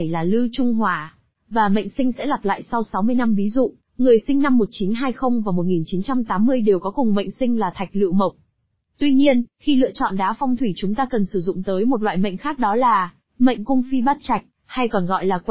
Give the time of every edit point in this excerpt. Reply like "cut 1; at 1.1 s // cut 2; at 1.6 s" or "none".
none